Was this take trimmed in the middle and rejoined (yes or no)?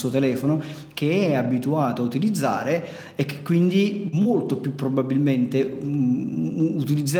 no